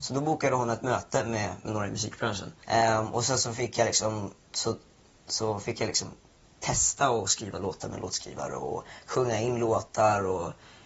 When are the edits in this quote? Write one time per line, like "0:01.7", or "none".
0:02.6